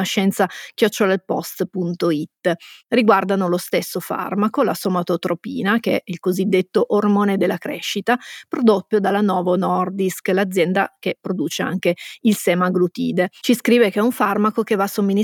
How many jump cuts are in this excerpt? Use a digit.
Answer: 2